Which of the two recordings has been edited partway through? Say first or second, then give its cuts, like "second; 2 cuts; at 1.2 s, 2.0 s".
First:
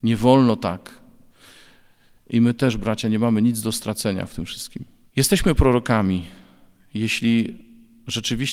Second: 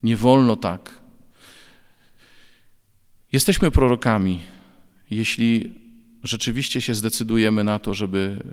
first; 2 cuts; at 2.2 s, 5.1 s